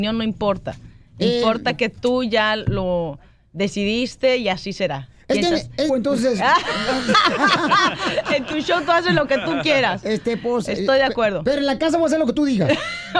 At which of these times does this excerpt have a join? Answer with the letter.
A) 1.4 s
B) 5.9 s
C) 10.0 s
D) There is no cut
B